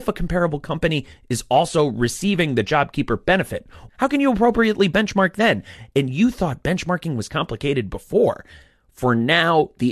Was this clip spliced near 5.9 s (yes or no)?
no